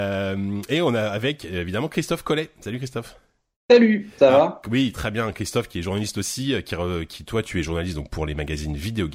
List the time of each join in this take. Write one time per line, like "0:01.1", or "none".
none